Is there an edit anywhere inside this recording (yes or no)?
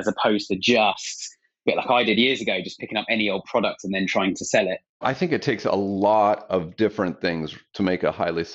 no